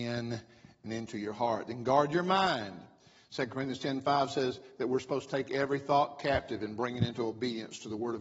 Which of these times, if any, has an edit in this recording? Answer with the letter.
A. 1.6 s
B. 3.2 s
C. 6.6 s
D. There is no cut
D